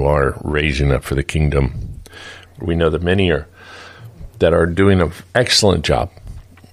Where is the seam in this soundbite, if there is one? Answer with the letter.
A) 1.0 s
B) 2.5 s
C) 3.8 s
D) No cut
B